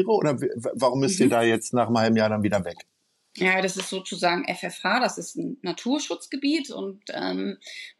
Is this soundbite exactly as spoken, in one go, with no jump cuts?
yes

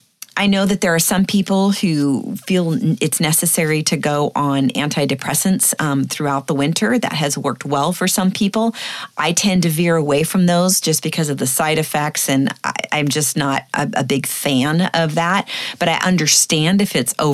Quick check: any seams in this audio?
no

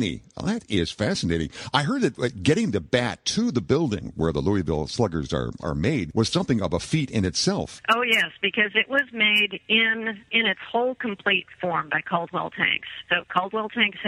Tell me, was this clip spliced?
yes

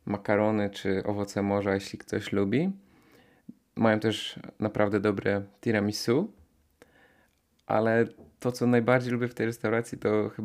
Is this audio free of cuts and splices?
yes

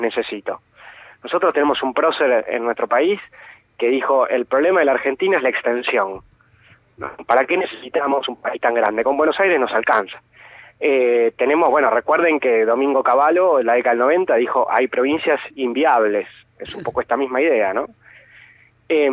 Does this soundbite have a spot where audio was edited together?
no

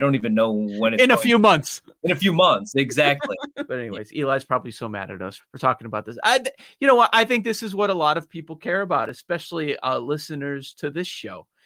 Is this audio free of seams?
no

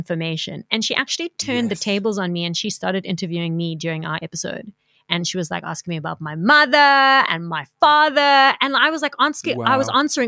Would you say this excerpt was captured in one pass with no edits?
yes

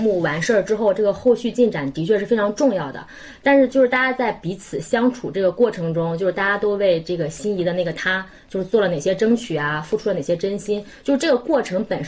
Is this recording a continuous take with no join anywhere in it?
yes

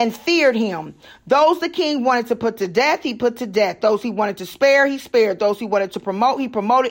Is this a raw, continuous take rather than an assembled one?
yes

